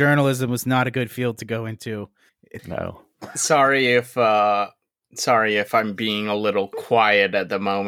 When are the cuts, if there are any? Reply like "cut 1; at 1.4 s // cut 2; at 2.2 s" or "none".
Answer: cut 1; at 2.6 s